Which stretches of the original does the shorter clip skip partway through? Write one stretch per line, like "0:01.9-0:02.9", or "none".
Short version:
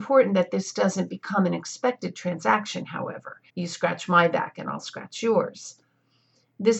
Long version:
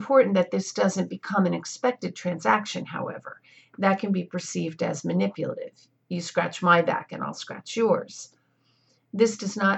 0:03.5-0:06.0